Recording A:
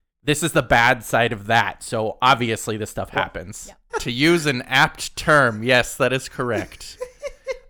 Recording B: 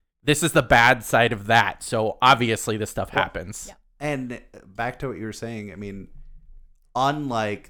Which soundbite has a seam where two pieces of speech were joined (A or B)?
A